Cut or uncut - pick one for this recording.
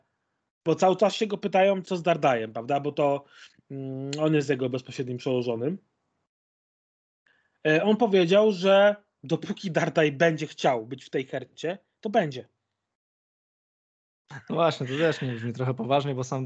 cut